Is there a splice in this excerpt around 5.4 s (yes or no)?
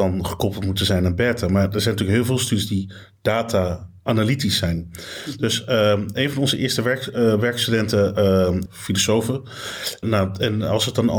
no